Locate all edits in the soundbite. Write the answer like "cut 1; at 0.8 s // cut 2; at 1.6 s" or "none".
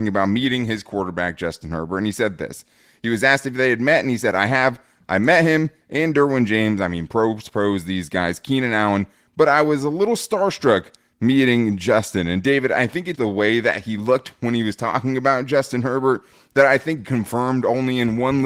cut 1; at 13.2 s // cut 2; at 17.0 s